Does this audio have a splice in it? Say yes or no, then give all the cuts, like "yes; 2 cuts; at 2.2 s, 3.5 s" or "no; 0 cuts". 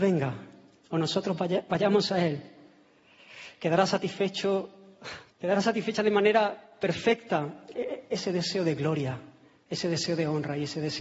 yes; 1 cut; at 5.3 s